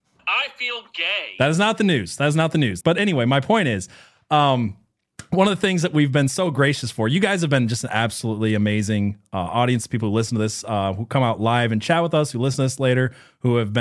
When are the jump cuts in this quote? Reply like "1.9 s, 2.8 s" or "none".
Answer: 2.8 s